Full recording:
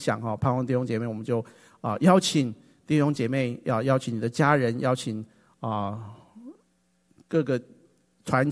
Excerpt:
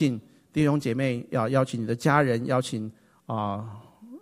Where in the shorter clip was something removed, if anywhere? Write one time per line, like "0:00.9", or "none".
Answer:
none

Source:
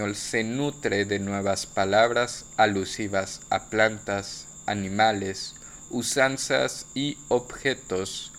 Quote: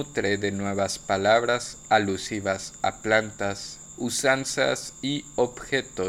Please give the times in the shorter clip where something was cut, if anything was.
0:04.0

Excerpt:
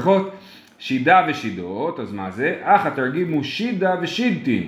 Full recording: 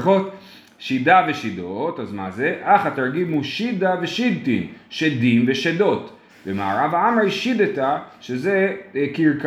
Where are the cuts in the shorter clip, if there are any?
none

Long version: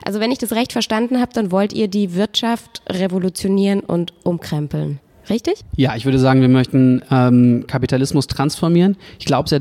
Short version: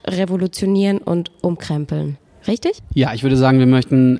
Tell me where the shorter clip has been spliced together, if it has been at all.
none

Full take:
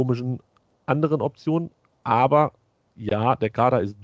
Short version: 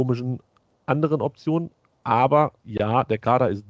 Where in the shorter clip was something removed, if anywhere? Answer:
0:02.6

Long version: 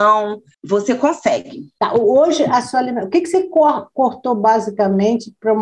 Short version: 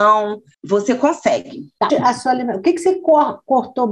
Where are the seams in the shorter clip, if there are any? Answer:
0:01.9

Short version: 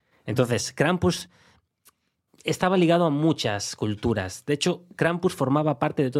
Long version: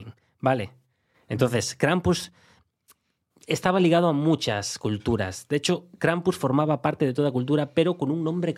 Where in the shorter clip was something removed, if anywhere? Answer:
none

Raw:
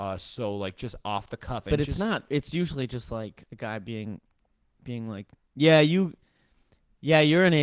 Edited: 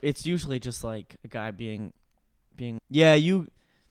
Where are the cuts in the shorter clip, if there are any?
0:02.8

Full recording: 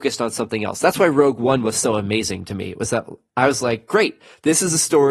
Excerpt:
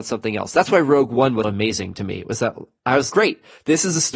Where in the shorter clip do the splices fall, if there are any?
0:01.4
0:03.1

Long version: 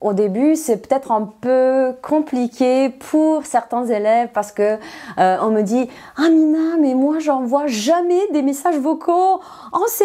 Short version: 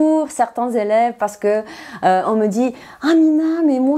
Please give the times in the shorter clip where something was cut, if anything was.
none

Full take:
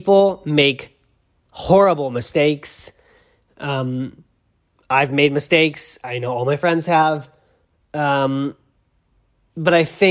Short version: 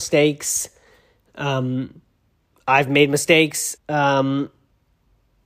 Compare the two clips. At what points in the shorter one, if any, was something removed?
0:03.8

